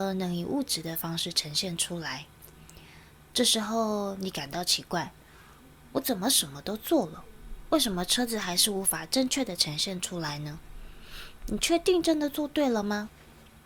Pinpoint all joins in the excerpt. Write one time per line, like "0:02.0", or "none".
0:03.1